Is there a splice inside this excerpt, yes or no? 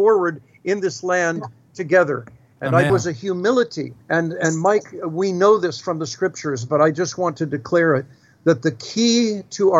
yes